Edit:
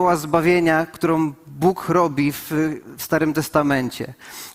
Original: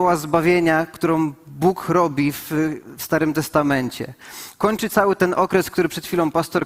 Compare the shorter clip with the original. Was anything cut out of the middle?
no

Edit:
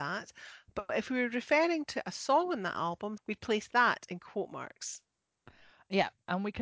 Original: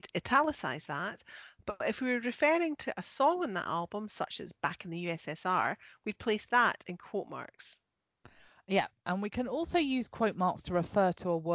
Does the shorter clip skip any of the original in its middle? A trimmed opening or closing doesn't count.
yes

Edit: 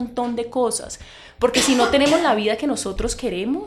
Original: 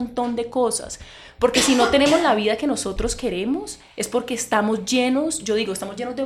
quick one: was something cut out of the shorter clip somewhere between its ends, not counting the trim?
no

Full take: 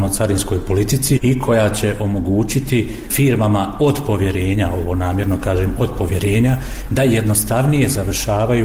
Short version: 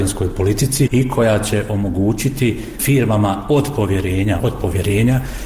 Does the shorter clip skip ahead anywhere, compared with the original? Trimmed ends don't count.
yes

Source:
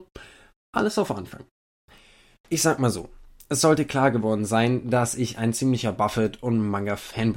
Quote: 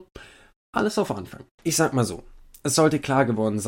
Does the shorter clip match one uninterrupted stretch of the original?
no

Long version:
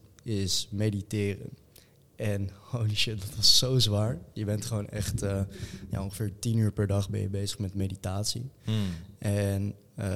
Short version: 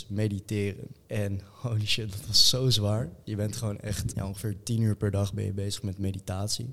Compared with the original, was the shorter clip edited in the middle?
yes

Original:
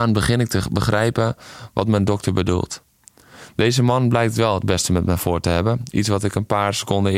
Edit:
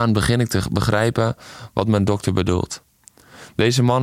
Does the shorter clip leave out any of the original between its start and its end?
no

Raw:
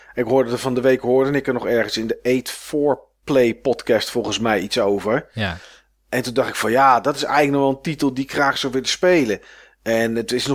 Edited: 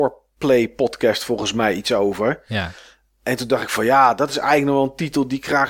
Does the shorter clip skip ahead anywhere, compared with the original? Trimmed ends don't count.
no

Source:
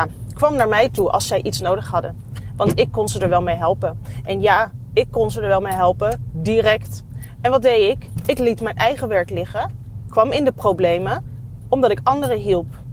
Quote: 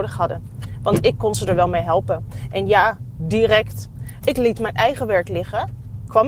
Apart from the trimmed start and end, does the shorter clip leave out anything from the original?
yes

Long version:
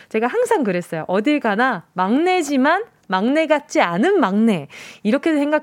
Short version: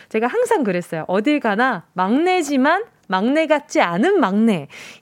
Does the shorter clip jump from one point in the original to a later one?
no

